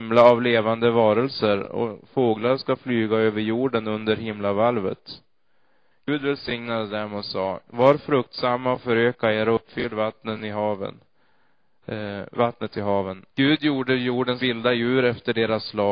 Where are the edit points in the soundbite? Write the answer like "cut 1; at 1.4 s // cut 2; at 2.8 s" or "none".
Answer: cut 1; at 5.9 s // cut 2; at 13.3 s

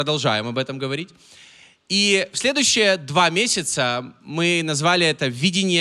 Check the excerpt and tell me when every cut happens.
none

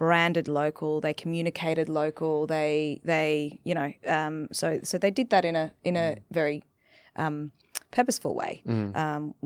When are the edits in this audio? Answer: none

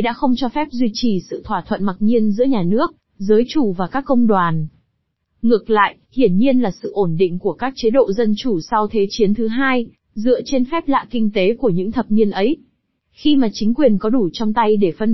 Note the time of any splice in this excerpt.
cut 1; at 5.2 s // cut 2; at 10.0 s

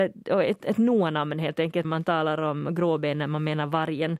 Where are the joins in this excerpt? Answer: cut 1; at 1.8 s

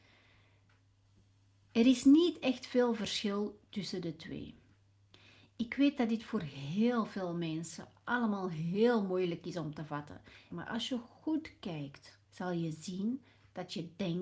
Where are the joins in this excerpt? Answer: cut 1; at 10.5 s // cut 2; at 12.2 s

